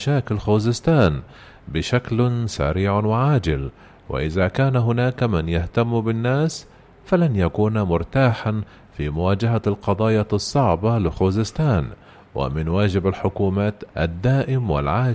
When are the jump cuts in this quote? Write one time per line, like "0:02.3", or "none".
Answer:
0:13.9